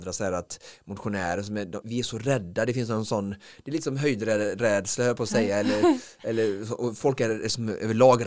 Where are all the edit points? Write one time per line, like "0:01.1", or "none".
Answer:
0:01.8